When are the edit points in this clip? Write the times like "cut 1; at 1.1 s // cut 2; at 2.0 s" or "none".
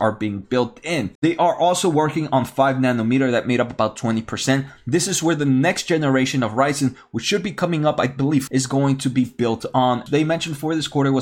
cut 1; at 1.2 s // cut 2; at 8.5 s // cut 3; at 10.1 s